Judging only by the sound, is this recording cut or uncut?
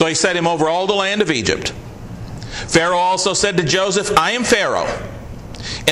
uncut